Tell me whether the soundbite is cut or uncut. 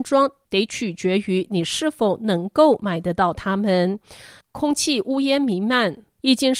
uncut